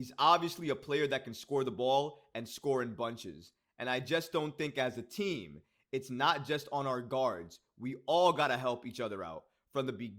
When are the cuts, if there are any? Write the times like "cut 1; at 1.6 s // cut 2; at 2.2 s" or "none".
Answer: none